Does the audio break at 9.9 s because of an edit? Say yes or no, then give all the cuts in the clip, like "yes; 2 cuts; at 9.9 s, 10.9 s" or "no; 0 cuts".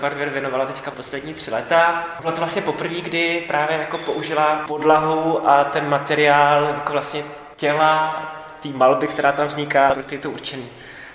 yes; 2 cuts; at 2.2 s, 9.9 s